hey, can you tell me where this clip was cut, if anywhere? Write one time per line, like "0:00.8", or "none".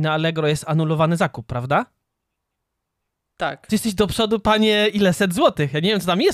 none